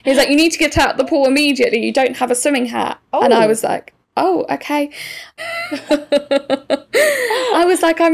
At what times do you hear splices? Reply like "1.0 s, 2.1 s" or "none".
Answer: 3.0 s, 5.4 s